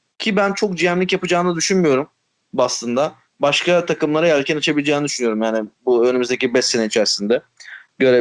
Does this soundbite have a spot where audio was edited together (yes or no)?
no